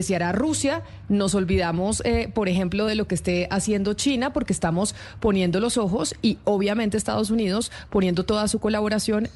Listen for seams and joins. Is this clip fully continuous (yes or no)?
yes